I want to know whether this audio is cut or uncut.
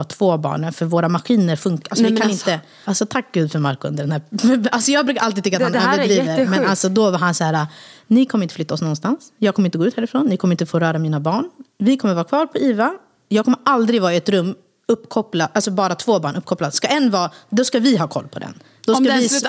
uncut